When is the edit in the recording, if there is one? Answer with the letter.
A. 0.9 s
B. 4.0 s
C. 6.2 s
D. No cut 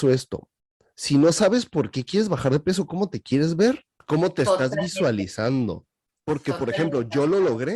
B